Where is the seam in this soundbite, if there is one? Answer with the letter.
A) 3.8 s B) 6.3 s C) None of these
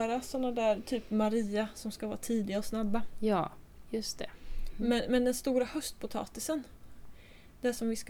C